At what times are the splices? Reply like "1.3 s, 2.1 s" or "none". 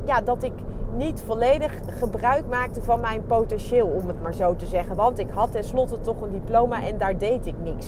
none